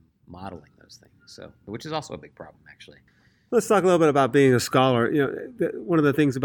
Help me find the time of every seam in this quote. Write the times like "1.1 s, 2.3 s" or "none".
none

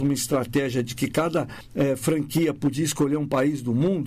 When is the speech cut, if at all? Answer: none

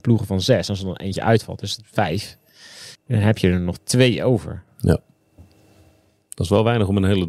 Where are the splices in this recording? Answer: 3.0 s

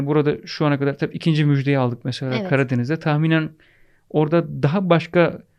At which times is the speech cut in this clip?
none

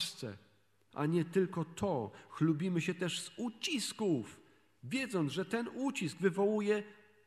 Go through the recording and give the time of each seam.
0.9 s

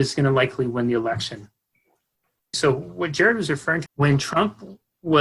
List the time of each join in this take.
2.5 s, 3.9 s

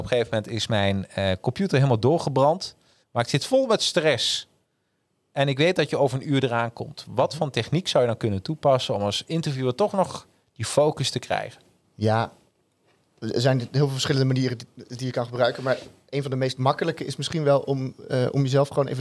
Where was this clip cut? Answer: 3.0 s, 11.8 s

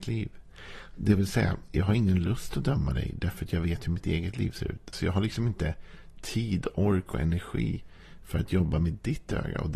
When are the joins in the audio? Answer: 4.9 s

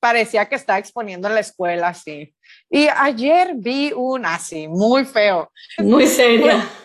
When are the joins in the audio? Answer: 5.8 s

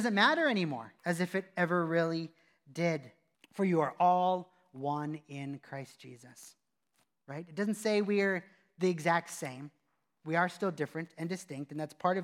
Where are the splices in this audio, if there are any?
1.0 s, 3.3 s

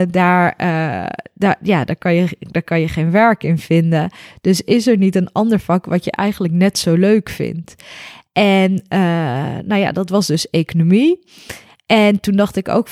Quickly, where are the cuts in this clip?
none

